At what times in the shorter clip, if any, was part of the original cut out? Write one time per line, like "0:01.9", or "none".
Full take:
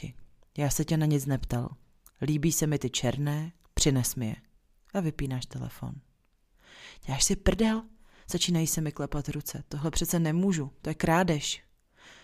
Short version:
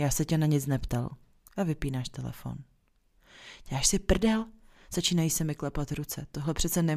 0:01.5

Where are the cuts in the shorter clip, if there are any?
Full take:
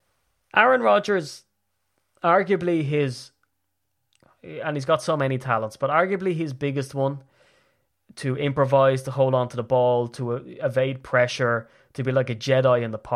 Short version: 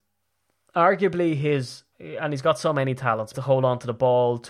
0:01.9
0:03.3

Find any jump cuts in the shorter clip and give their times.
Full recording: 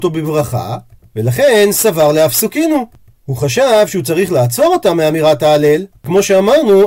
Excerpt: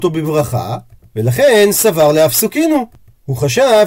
none

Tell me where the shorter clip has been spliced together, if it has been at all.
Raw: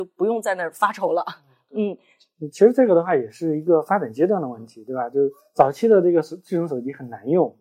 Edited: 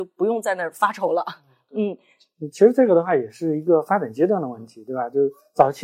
none

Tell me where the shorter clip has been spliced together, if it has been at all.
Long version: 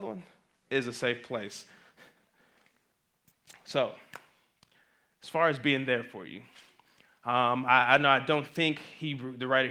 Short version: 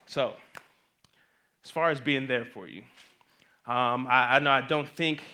none

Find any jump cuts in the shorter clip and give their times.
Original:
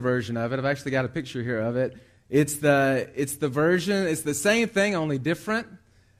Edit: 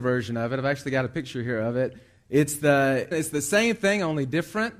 0:03.1

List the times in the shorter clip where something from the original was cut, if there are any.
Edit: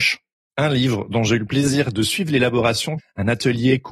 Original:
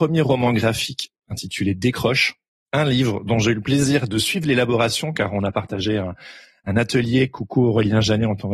0:03.0

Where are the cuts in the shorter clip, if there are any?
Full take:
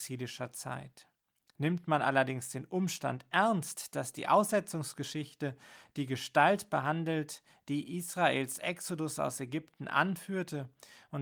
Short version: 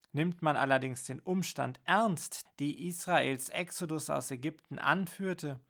0:02.5

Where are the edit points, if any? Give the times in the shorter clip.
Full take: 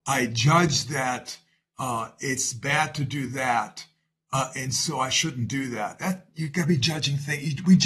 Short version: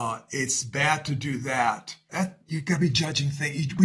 0:02.1

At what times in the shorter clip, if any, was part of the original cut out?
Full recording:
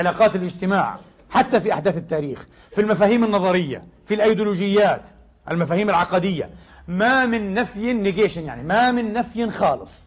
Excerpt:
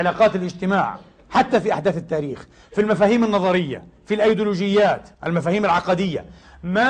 0:05.1

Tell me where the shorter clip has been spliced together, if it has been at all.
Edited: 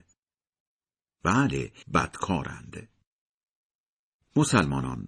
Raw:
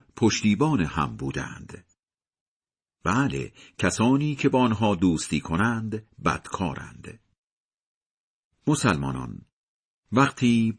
0:01.8

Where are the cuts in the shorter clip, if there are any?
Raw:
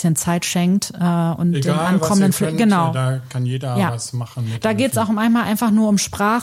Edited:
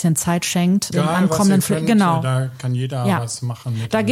0:00.9

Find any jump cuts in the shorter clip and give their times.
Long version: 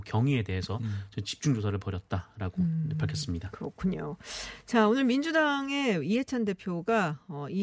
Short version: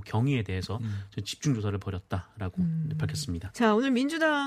0:03.5

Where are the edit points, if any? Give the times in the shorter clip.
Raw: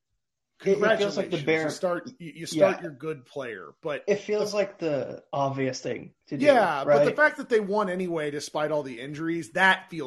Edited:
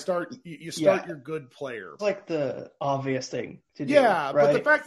0:02.0

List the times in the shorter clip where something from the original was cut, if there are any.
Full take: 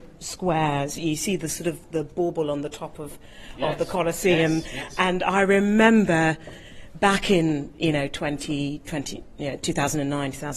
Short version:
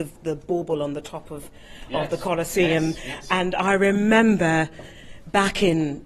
none

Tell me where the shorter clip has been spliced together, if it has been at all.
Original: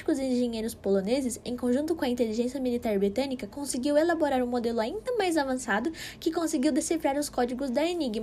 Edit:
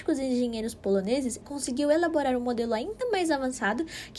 0:01.4

